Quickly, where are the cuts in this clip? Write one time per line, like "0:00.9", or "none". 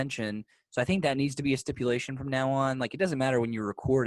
none